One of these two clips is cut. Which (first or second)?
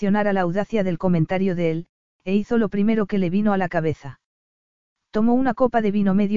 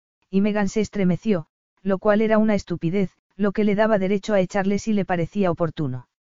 second